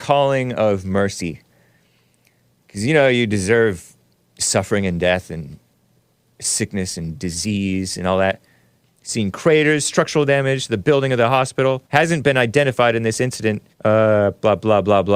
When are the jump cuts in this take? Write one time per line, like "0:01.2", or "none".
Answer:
0:08.8
0:11.9
0:13.7